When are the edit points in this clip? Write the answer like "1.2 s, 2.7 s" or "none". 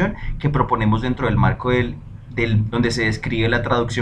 2.7 s